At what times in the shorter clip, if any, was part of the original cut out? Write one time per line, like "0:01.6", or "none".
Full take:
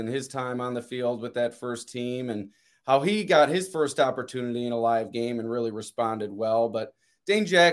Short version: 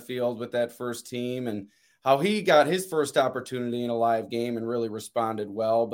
none